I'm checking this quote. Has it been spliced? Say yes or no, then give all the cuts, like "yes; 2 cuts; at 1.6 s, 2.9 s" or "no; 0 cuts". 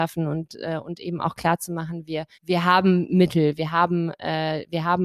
yes; 2 cuts; at 2.3 s, 3.6 s